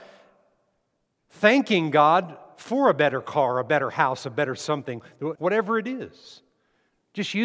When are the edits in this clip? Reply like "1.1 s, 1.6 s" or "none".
5.4 s